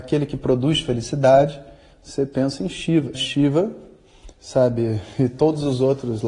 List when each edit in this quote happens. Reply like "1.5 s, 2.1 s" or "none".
1.9 s, 3.1 s, 4.3 s